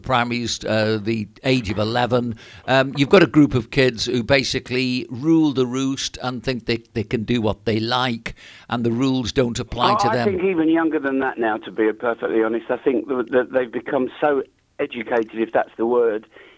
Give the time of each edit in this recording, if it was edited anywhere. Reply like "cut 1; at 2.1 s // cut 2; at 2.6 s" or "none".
none

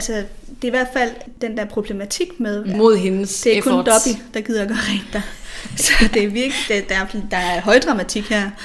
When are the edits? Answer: cut 1; at 2.7 s

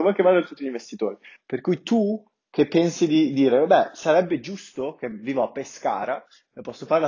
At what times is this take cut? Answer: cut 1; at 1.4 s

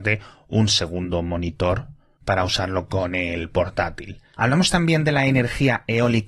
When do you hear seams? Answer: cut 1; at 4.3 s

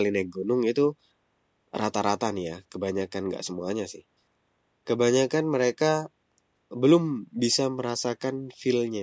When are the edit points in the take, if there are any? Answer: cut 1; at 6.7 s

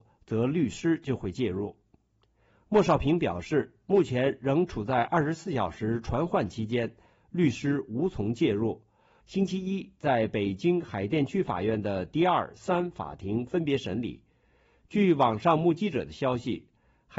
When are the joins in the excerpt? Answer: cut 1; at 2.5 s // cut 2; at 9.2 s

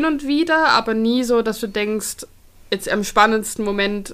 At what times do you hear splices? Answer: none

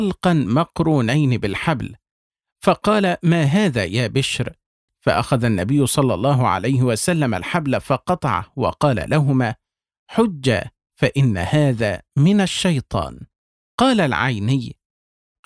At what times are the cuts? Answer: cut 1; at 4.9 s // cut 2; at 13.6 s

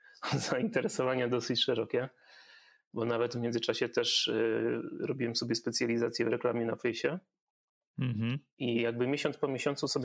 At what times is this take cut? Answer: none

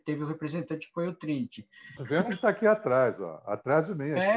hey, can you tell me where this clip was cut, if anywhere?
cut 1; at 2.0 s

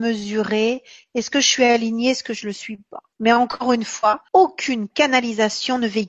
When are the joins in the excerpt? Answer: cut 1; at 3.1 s // cut 2; at 4.3 s

